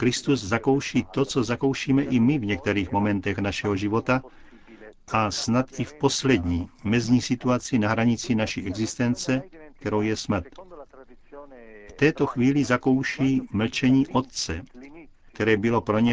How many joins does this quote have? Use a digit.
0